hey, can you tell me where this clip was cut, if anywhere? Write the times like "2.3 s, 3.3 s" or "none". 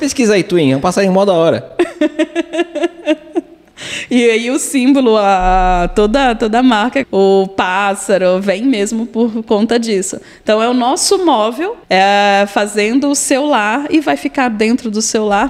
7.0 s, 11.8 s